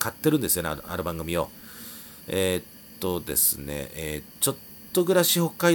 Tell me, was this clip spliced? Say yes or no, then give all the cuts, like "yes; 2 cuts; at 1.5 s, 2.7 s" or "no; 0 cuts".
yes; 2 cuts; at 2.2 s, 4.3 s